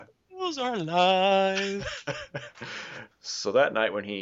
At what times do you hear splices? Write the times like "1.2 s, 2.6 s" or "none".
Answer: 3.1 s